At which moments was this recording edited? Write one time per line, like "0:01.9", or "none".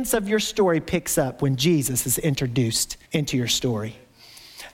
0:03.0

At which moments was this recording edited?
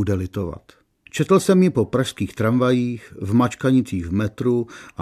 0:01.1

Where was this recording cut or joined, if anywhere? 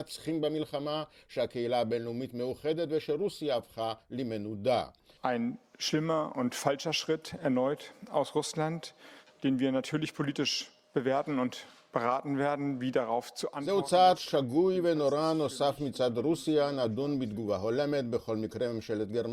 0:05.2

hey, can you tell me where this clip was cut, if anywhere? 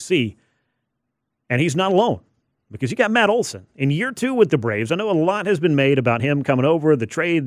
none

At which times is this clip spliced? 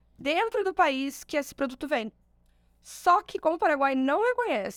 none

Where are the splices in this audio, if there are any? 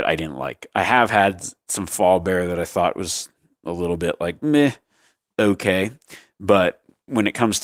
none

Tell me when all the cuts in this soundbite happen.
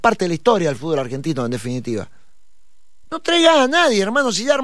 0:03.0

